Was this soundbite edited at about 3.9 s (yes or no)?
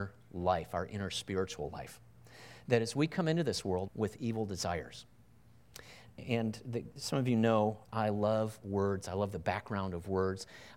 yes